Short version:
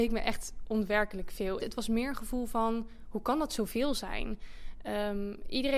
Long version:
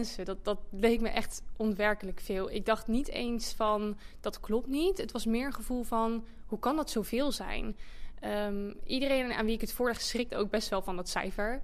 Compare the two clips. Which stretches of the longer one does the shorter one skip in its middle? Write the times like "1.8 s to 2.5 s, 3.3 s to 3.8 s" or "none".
2.5 s to 5.0 s